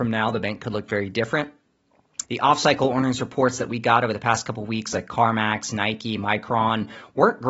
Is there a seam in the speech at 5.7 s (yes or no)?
no